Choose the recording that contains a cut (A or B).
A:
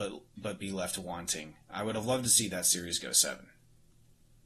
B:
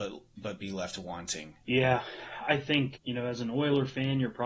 B